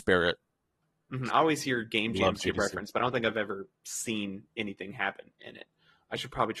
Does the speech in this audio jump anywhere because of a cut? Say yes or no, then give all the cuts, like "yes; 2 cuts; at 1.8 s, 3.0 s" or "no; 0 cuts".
yes; 1 cut; at 1.3 s